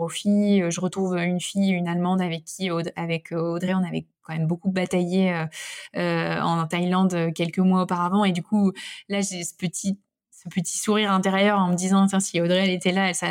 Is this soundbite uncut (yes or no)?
yes